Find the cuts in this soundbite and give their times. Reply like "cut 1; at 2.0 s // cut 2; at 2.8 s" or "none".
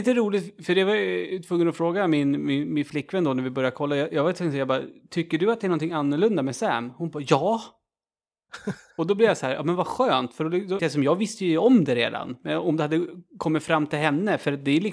cut 1; at 10.8 s